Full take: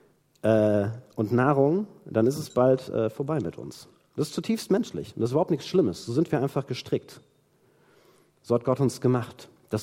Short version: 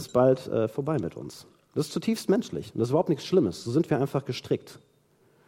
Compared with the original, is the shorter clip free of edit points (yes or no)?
yes